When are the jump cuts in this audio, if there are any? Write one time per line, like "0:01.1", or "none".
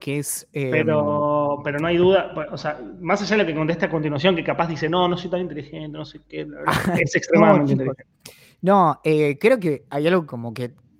0:07.0